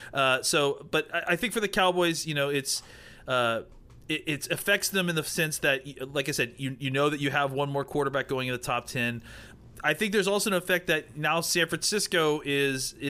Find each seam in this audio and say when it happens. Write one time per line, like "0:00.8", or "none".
none

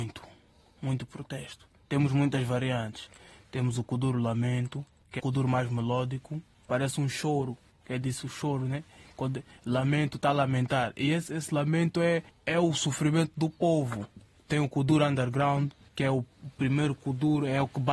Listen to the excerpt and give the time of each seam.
0:05.2

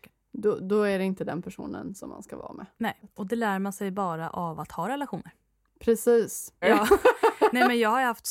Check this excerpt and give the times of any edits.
0:06.6

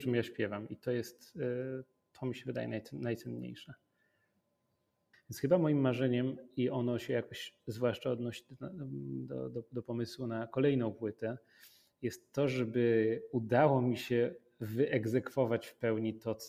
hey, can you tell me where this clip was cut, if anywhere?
0:05.1

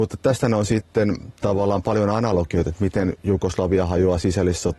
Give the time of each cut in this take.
0:02.7

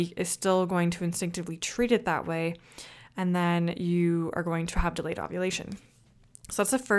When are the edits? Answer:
none

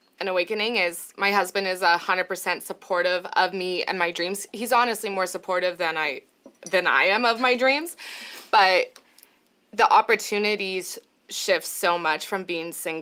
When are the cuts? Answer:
none

